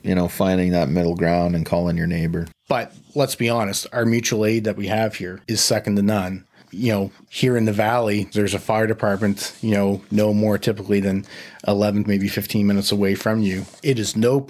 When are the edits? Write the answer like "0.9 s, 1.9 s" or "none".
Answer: 2.5 s, 5.4 s, 12.0 s